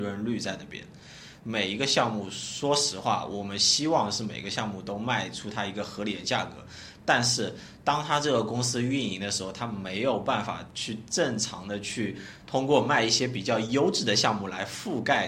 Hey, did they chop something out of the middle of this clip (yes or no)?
yes